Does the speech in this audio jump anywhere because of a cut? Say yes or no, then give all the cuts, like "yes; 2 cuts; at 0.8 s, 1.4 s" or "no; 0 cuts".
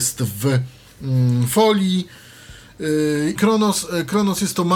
yes; 1 cut; at 3.4 s